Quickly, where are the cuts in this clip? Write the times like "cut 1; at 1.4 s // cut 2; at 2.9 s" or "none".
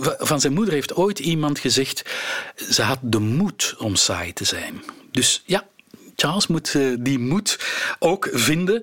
none

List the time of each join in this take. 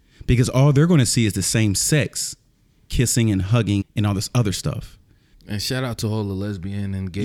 cut 1; at 3.8 s // cut 2; at 5.3 s

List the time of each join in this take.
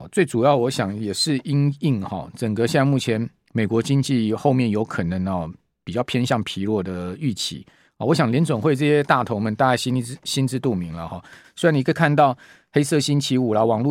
cut 1; at 11.4 s

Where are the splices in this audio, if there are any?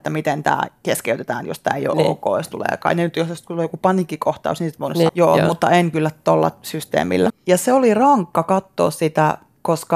cut 1; at 5.1 s // cut 2; at 7.3 s

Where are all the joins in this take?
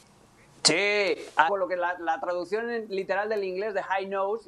cut 1; at 1.5 s

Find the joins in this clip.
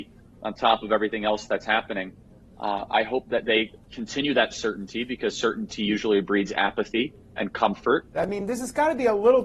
cut 1; at 2.5 s // cut 2; at 8.1 s

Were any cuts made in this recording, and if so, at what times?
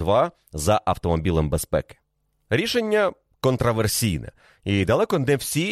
none

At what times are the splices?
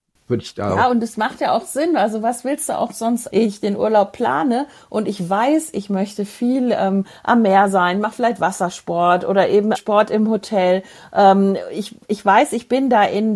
cut 1; at 3.3 s // cut 2; at 9.7 s

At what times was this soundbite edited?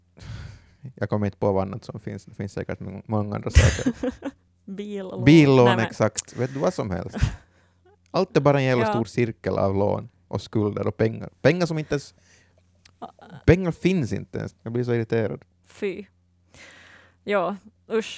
cut 1; at 14.5 s

